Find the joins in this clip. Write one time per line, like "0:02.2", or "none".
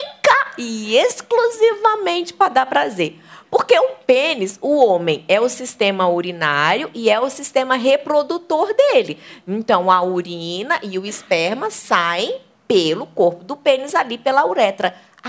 none